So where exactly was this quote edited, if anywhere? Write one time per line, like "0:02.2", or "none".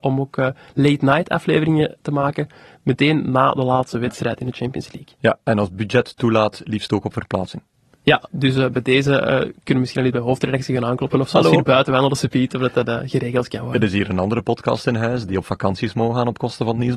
none